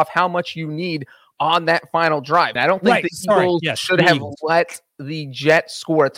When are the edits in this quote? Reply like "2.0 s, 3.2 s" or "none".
2.6 s